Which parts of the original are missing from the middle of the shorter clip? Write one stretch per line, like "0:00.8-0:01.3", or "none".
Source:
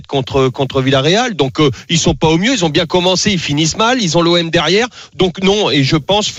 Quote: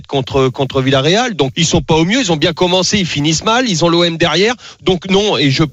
0:01.5-0:01.9